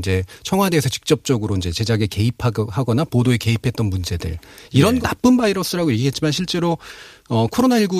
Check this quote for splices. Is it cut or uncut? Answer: cut